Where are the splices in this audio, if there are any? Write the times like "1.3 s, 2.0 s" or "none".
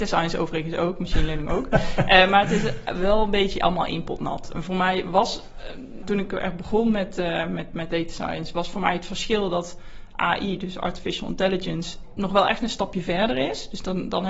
6.0 s